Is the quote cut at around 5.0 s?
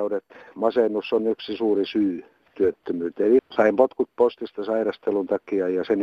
no; 1 cut; at 3.4 s

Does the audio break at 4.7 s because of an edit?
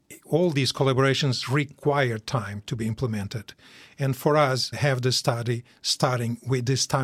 yes; 1 cut; at 4.7 s

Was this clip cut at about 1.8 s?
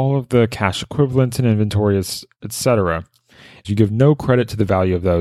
no; 1 cut; at 3.6 s

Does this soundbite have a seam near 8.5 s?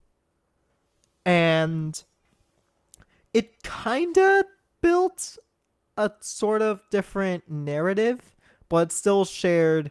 no; 0 cuts

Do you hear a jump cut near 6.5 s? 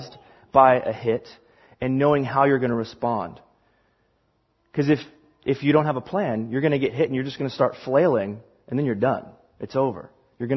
no; 0 cuts

